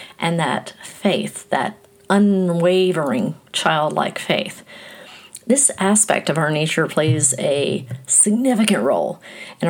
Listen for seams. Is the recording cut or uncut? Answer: uncut